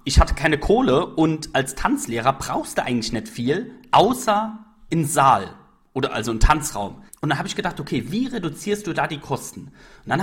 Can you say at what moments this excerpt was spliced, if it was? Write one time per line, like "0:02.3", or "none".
0:07.1